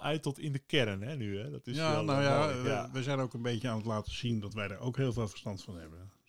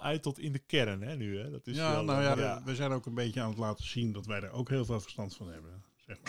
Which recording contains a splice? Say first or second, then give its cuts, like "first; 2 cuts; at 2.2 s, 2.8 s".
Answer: second; 1 cut; at 2.3 s